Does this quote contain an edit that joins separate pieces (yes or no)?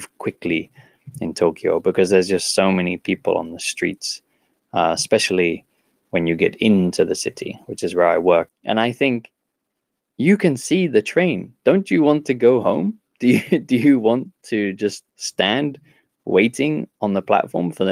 yes